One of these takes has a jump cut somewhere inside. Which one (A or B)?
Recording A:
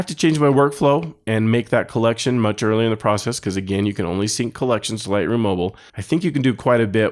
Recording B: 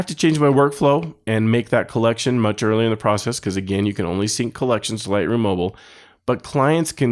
A